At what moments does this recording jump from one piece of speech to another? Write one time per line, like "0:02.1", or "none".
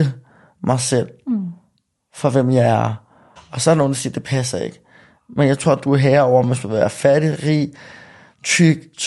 0:03.4